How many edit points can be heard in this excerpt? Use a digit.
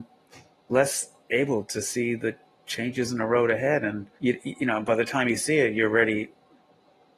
1